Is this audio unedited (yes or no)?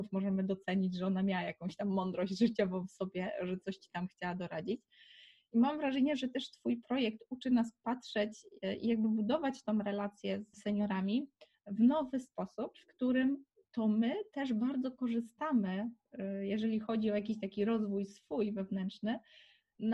no